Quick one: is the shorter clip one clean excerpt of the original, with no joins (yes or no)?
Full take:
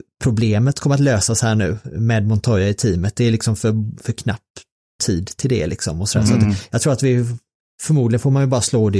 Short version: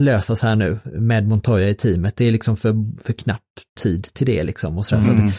no